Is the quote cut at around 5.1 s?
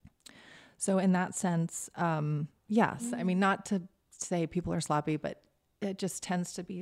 no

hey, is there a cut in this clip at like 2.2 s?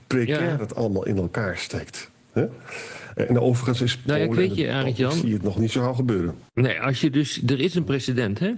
no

